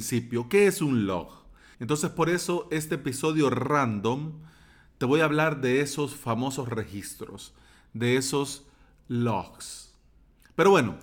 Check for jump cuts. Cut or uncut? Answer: cut